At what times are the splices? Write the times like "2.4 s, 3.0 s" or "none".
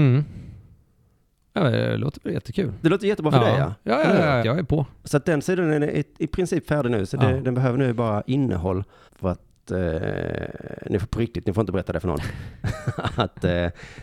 4.4 s, 9.1 s